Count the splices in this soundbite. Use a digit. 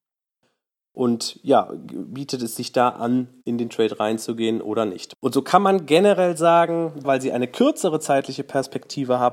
2